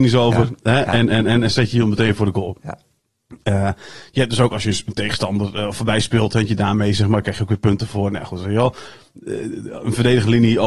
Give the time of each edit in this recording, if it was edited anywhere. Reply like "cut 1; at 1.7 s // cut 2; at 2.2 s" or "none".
none